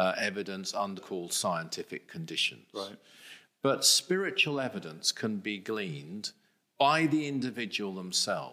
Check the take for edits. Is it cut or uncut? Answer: cut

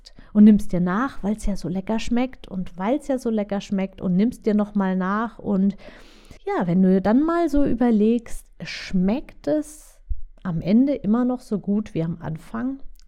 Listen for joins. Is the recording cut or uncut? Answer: cut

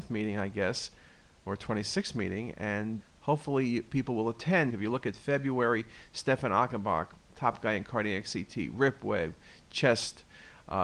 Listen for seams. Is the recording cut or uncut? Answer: cut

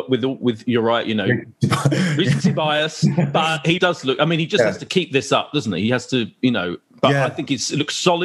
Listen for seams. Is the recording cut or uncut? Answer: cut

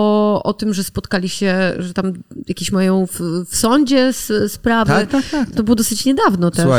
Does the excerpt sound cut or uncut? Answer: cut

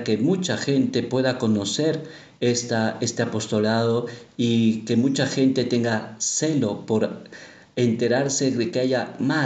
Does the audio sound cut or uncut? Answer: uncut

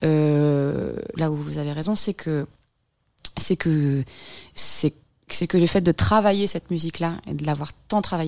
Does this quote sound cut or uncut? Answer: cut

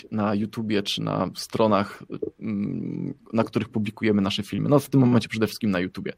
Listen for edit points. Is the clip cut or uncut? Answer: uncut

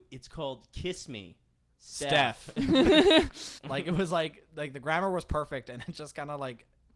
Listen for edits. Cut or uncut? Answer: cut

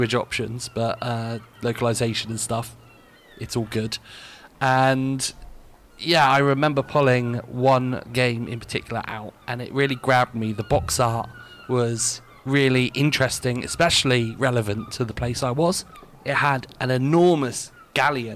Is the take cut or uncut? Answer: cut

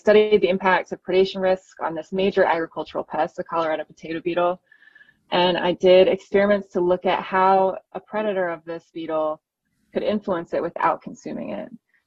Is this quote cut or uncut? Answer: uncut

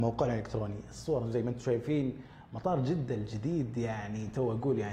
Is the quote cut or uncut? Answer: uncut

